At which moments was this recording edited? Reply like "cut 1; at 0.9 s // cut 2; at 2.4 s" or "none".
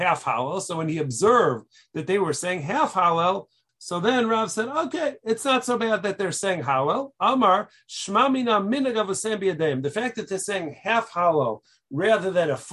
cut 1; at 3.7 s